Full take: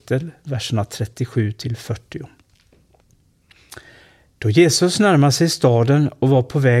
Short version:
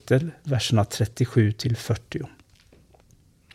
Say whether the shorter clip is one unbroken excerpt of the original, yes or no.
yes